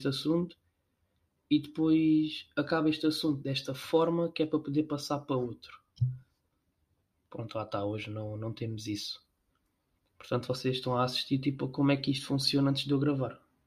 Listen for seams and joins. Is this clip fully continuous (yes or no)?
yes